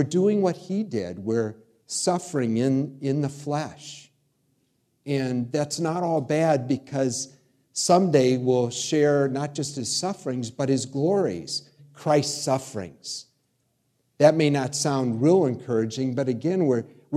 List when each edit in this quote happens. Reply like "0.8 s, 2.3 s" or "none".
11.8 s